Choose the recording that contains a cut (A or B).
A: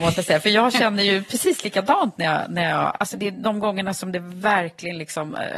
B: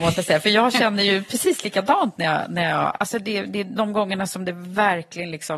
A